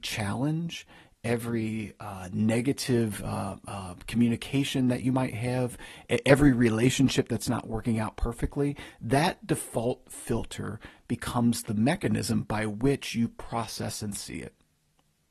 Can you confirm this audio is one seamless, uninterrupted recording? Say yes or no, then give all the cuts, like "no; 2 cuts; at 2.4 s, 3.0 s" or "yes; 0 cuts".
yes; 0 cuts